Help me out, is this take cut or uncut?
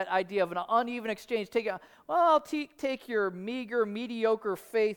uncut